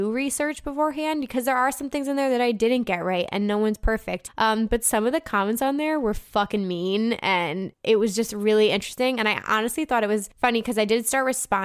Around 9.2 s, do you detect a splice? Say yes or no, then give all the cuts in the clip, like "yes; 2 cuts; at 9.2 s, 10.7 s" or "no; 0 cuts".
no; 0 cuts